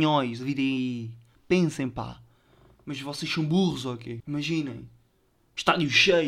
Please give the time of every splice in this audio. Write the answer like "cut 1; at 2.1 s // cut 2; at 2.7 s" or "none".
cut 1; at 4.2 s